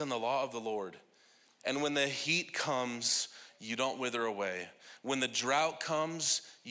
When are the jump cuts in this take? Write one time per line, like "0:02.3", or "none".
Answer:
0:01.6